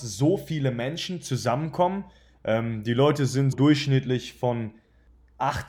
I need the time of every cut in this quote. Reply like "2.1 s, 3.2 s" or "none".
2.3 s, 3.5 s